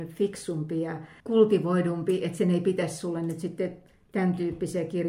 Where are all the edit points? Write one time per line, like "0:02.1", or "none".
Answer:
0:01.2